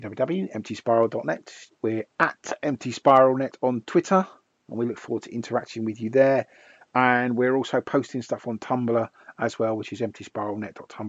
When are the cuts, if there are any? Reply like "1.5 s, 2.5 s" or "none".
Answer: 1.7 s